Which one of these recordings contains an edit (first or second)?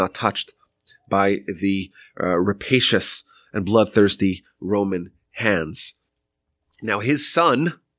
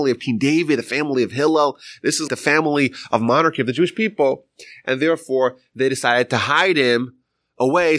second